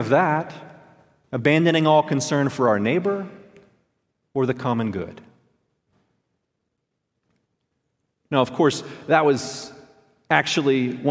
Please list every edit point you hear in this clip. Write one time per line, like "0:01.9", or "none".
0:01.2